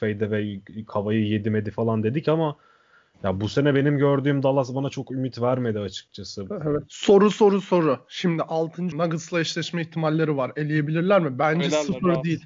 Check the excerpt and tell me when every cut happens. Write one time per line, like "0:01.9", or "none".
0:08.9